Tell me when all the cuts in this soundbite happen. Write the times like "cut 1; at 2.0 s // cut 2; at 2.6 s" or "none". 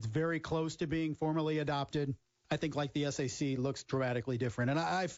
cut 1; at 2.4 s